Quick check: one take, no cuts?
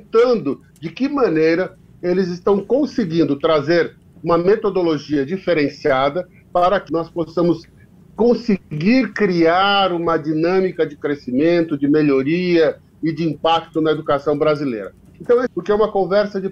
no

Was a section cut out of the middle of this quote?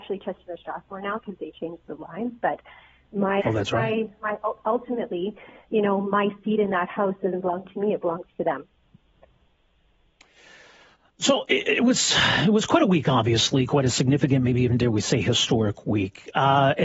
yes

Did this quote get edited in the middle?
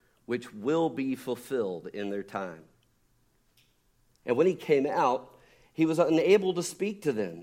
yes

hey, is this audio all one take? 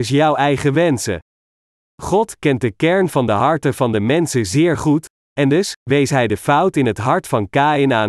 yes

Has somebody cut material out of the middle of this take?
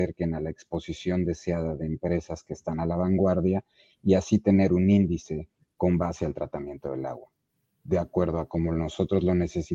no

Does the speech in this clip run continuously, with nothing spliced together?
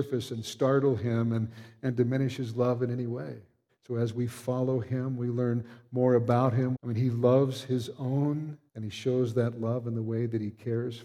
no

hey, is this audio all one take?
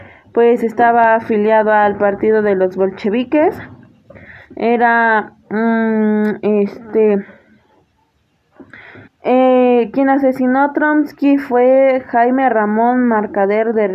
no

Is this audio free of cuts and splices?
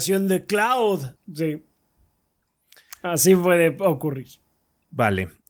no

